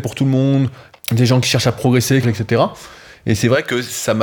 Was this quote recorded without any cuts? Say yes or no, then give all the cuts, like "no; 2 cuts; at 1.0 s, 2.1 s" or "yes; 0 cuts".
no; 2 cuts; at 0.9 s, 2.2 s